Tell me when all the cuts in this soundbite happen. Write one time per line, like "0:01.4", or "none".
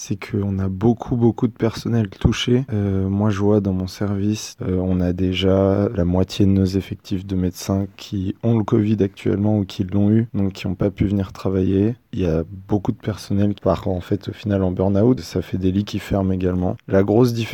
0:15.2